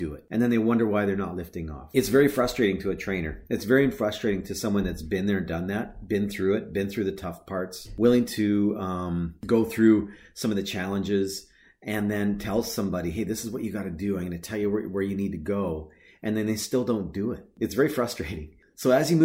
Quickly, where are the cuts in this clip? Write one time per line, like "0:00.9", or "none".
none